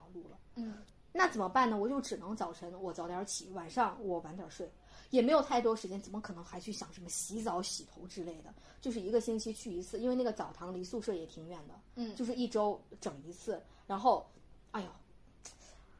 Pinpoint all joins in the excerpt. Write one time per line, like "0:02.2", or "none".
0:11.9